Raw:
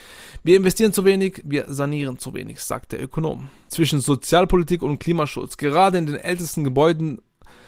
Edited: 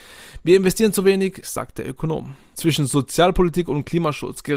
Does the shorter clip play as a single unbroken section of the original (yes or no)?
no